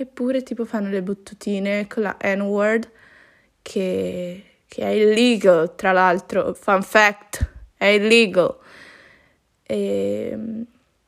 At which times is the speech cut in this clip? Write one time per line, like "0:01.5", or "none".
none

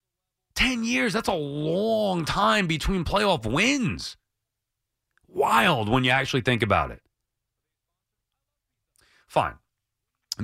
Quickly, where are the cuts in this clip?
0:09.2

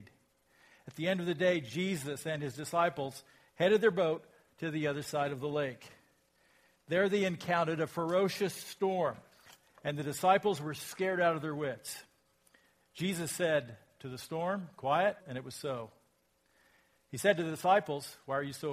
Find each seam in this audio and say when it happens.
0:15.2

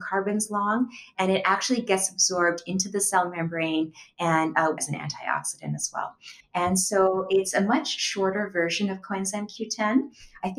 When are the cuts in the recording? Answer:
0:04.8
0:06.4

